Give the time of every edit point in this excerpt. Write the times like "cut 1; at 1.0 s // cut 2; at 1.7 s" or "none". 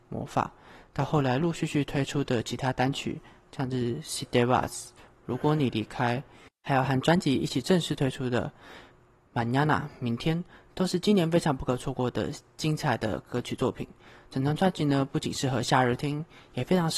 cut 1; at 1.4 s